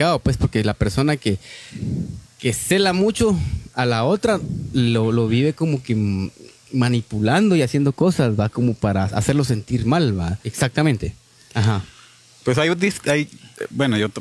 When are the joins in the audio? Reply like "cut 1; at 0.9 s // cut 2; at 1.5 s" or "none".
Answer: cut 1; at 10.4 s

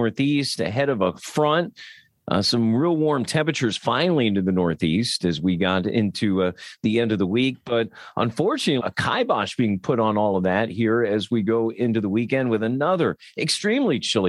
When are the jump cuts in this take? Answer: cut 1; at 8.8 s

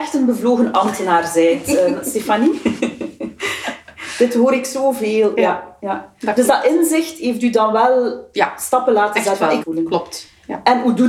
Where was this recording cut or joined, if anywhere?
cut 1; at 9.6 s

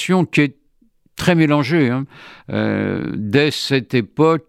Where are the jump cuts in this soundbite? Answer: none

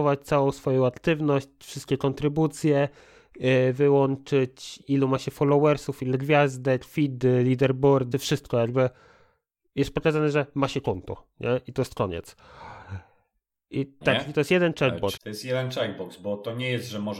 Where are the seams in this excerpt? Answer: cut 1; at 8.1 s // cut 2; at 14.0 s // cut 3; at 15.2 s

